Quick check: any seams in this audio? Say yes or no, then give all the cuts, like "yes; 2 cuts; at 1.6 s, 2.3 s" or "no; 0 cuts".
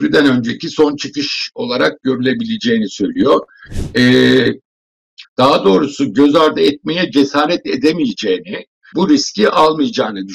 yes; 2 cuts; at 5.2 s, 8.9 s